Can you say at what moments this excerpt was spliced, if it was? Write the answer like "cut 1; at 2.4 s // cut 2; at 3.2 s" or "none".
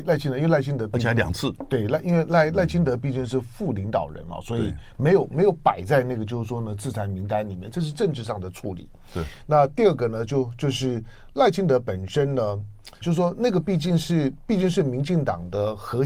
cut 1; at 13.0 s